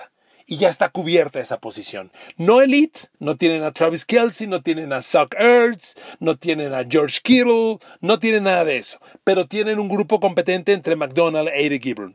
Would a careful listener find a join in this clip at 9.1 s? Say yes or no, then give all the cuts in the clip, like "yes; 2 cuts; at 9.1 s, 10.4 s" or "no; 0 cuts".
no; 1 cut; at 3.1 s